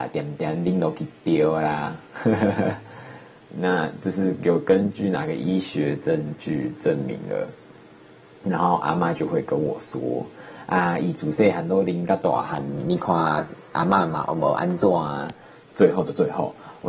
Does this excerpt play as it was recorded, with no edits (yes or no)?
no